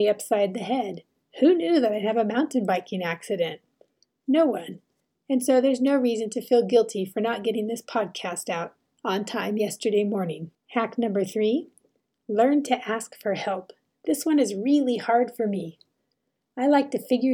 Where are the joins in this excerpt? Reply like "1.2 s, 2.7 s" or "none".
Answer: none

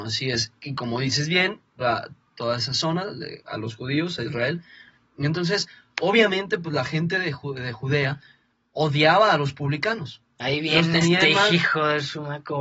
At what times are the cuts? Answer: 1.8 s

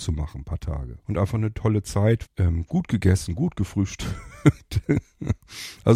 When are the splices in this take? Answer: 1.0 s, 2.3 s

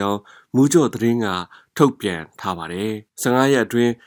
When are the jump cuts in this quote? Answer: 3.1 s

